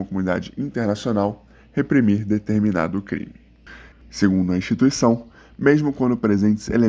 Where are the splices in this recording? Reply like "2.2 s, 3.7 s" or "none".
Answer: 3.9 s